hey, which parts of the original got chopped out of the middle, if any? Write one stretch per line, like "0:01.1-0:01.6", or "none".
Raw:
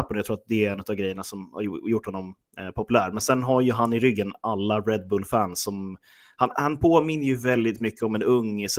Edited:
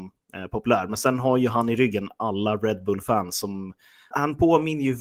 0:06.3-0:06.5